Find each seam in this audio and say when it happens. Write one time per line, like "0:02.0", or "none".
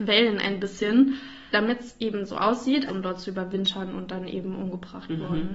0:01.5
0:02.9